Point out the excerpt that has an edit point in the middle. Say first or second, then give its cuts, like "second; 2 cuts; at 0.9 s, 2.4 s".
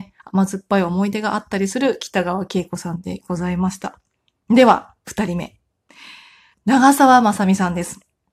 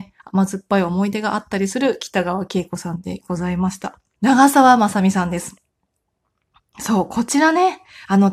second; 1 cut; at 4.2 s